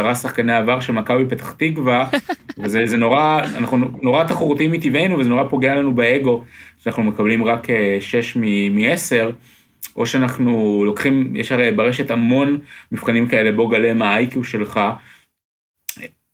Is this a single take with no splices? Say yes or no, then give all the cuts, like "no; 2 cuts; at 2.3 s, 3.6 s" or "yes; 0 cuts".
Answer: yes; 0 cuts